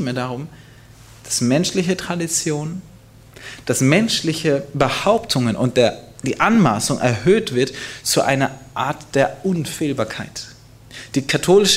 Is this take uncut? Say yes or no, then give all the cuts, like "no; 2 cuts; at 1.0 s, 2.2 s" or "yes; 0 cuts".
yes; 0 cuts